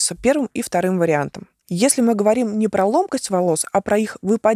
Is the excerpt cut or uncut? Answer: cut